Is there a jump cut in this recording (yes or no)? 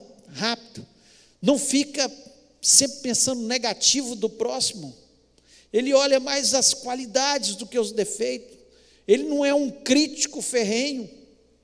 no